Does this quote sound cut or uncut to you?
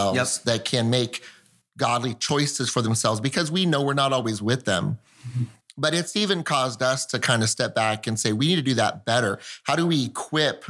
uncut